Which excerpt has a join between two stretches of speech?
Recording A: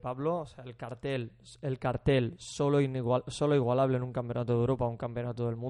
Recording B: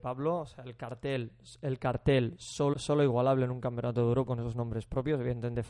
B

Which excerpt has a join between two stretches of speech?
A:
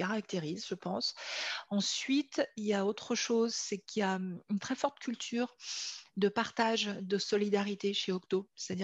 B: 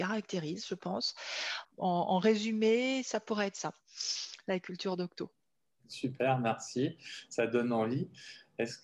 B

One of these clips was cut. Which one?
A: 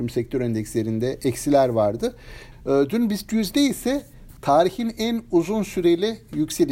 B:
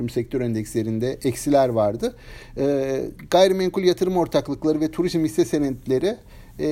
A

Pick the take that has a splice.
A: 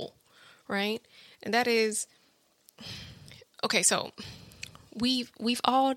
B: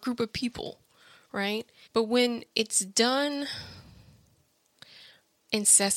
B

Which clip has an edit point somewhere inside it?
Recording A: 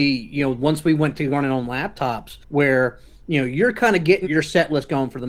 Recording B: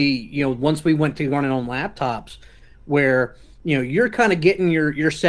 A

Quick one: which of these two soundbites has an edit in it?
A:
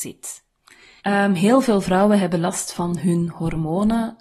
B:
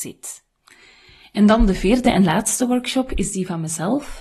A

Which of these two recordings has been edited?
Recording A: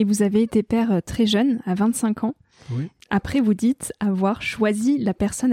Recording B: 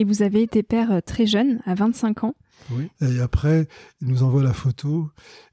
B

